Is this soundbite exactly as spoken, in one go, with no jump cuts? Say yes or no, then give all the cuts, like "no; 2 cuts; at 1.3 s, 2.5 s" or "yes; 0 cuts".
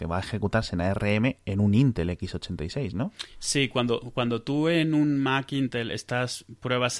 yes; 0 cuts